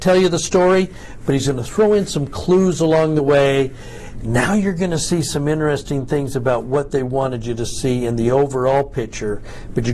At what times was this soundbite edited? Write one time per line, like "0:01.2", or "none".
0:04.1